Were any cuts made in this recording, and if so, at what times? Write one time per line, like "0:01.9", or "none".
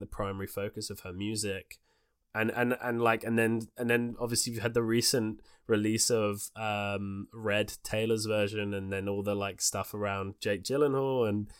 none